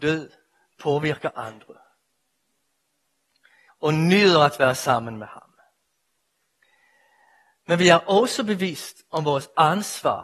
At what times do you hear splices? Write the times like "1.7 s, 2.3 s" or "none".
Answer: 3.7 s